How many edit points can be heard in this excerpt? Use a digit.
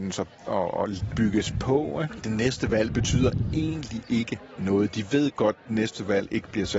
1